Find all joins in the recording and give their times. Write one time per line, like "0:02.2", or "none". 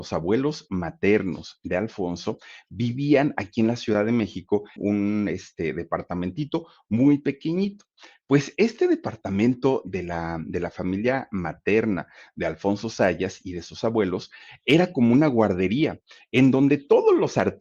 0:04.8